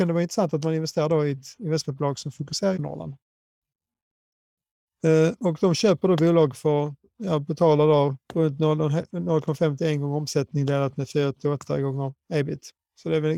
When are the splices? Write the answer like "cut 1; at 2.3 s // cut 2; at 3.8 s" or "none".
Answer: cut 1; at 2.8 s // cut 2; at 8.2 s